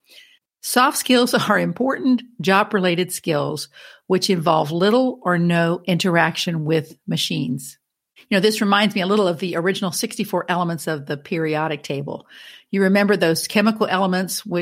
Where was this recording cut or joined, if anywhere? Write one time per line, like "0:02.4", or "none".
0:08.2